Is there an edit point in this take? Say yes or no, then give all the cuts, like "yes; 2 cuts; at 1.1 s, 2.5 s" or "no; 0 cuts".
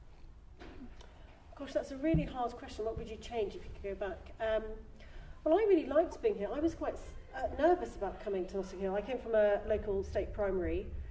no; 0 cuts